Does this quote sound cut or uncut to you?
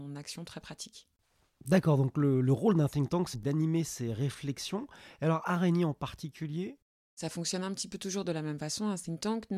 cut